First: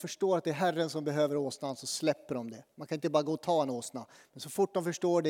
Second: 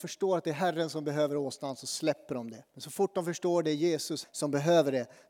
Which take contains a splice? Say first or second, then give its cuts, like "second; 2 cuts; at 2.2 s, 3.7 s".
second; 2 cuts; at 2.7 s, 4.2 s